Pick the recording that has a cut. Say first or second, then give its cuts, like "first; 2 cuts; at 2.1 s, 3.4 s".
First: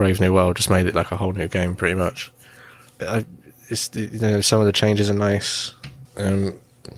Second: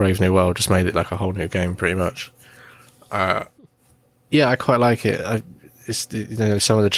first; 2 cuts; at 3.0 s, 6.1 s